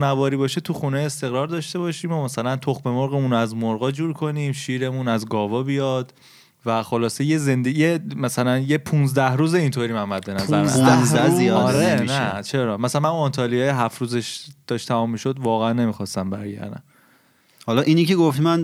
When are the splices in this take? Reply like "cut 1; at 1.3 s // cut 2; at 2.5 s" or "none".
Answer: none